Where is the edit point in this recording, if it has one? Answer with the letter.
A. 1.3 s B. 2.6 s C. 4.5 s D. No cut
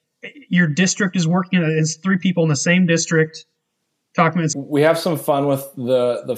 C